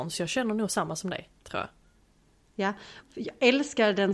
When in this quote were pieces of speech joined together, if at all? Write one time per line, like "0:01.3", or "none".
0:03.0